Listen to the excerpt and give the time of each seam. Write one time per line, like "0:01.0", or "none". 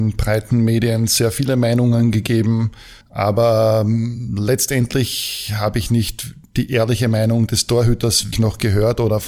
0:03.0
0:08.3

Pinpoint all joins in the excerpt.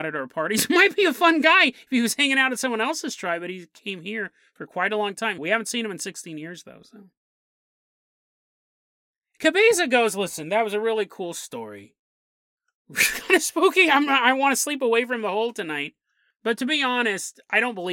0:05.4

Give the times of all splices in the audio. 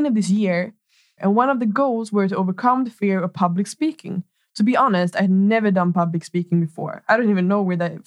0:01.2

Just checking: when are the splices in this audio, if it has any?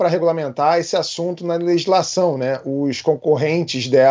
none

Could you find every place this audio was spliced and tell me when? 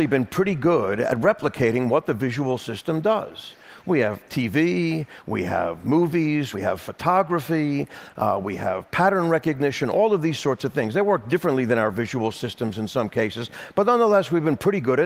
0:06.5

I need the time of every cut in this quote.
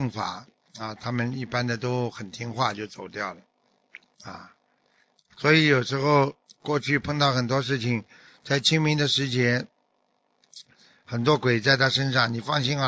none

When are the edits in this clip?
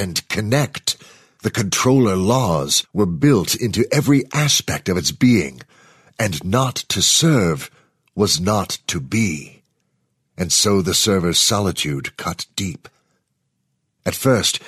none

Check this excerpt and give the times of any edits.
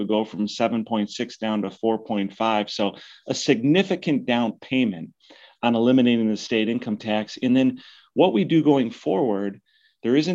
none

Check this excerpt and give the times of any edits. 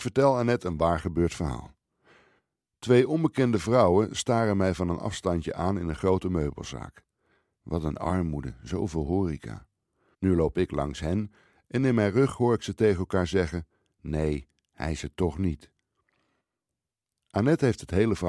0:07.6
0:10.1

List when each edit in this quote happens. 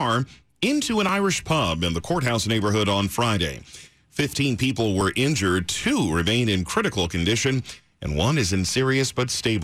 none

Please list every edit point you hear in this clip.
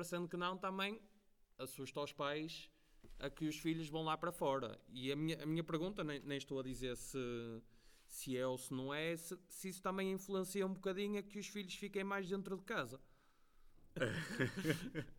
0:14.0

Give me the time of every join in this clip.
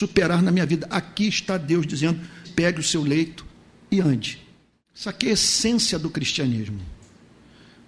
0:02.4
0:04.7

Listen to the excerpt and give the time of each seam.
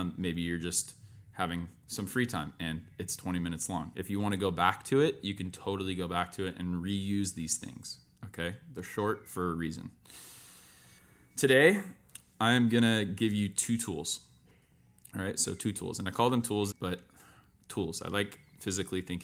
0:16.7

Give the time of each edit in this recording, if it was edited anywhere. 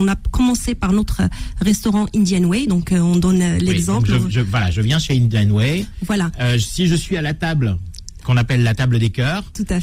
none

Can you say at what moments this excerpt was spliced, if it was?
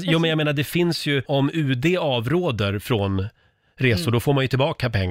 0:01.3

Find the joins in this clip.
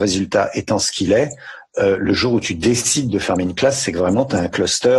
none

